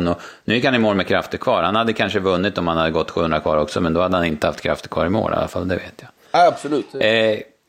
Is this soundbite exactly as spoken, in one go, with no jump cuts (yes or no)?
yes